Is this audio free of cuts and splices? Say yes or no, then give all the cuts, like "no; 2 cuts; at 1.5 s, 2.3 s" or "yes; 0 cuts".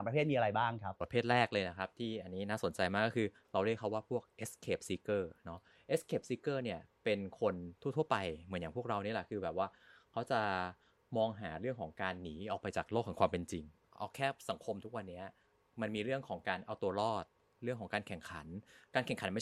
yes; 0 cuts